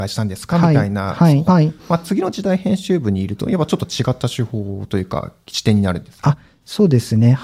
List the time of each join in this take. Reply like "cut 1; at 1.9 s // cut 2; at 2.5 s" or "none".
cut 1; at 1.5 s